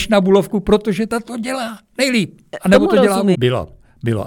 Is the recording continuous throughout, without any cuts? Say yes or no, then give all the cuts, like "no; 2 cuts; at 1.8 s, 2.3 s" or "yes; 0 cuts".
no; 1 cut; at 3.3 s